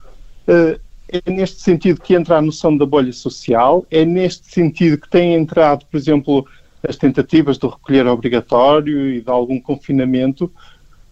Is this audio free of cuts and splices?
yes; 0 cuts

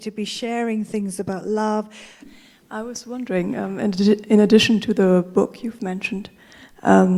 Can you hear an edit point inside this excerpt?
yes; 1 cut; at 2.2 s

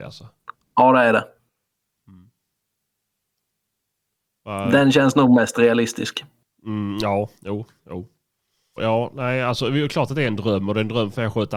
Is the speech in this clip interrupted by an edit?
yes; 1 cut; at 8.8 s

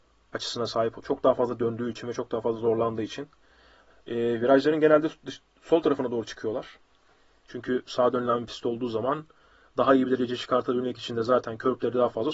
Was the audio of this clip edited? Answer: no; 0 cuts

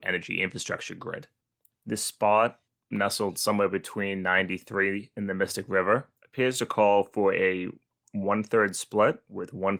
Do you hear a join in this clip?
yes; 2 cuts; at 1.7 s, 6.2 s

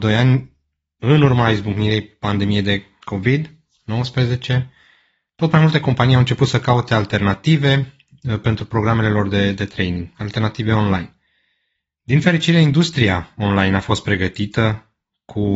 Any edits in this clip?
no; 0 cuts

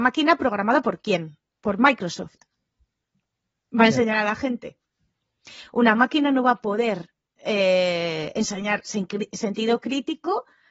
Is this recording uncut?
yes; 0 cuts

